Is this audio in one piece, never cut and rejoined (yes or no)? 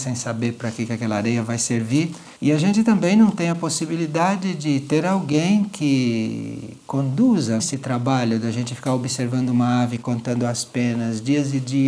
no